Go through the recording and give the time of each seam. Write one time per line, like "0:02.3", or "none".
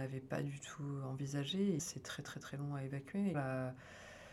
0:01.8
0:03.3